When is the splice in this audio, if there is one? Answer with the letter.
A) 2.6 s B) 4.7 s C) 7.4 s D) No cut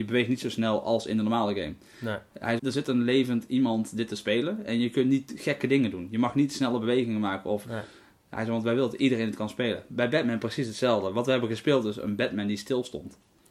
A